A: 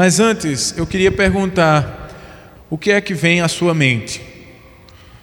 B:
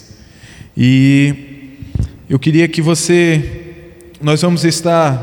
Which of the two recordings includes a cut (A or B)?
A